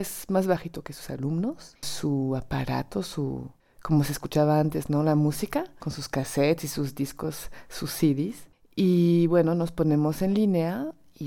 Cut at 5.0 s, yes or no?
no